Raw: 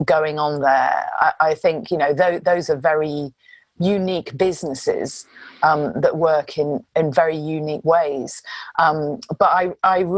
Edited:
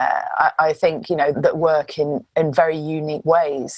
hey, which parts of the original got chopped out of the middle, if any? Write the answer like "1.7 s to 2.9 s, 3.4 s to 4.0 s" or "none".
2.2 s to 5.9 s